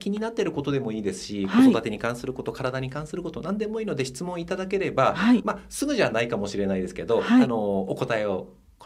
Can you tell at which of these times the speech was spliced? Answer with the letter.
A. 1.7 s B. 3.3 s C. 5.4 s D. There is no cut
C